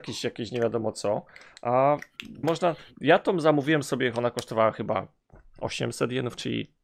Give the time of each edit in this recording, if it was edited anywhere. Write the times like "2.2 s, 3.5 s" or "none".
2.4 s

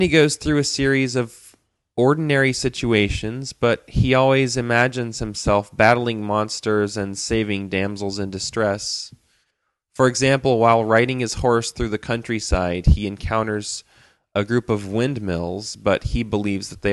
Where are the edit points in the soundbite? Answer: none

